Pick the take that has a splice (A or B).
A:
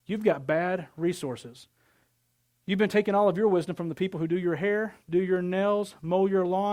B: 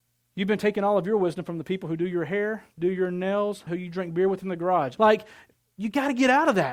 B